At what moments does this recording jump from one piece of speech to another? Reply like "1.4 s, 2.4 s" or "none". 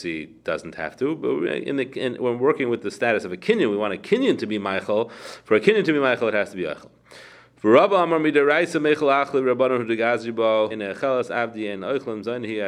10.7 s